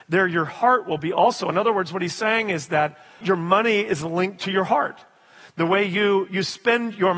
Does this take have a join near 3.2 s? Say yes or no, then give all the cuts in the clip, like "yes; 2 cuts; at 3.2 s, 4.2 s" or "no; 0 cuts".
yes; 1 cut; at 3.2 s